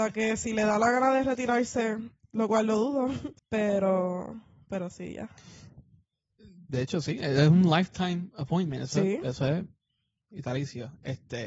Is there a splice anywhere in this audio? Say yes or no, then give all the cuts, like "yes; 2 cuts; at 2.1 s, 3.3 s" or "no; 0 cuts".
no; 0 cuts